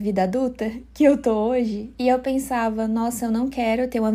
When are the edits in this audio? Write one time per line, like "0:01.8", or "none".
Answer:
none

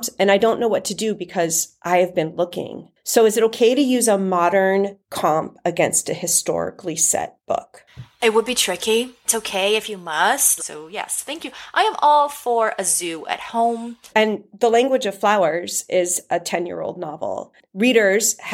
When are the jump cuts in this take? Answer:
0:10.6
0:14.1

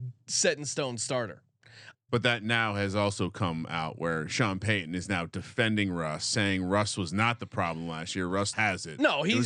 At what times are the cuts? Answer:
0:01.9
0:08.5

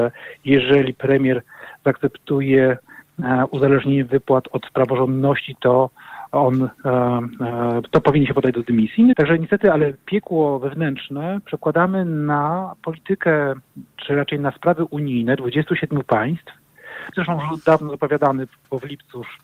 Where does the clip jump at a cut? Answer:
0:09.1
0:17.1

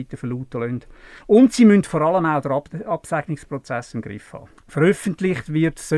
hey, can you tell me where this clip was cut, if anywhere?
0:04.6

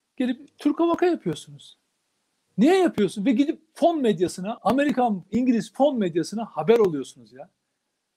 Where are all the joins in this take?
0:04.6

